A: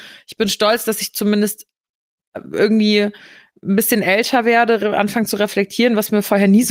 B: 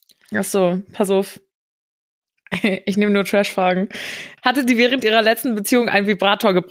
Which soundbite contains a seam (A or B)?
B